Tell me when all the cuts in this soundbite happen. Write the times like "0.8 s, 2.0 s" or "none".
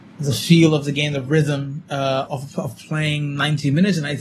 2.3 s